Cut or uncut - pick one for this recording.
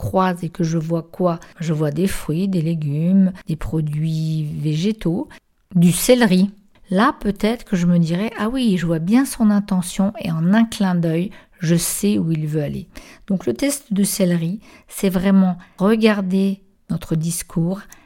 uncut